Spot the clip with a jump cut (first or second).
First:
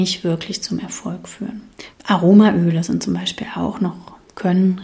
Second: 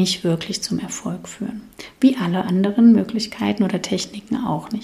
first